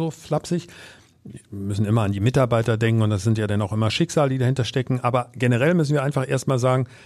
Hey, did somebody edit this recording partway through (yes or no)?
no